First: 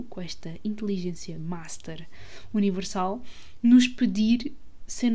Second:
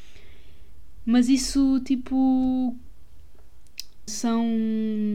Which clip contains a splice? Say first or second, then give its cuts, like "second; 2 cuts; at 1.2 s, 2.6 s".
second; 1 cut; at 4.1 s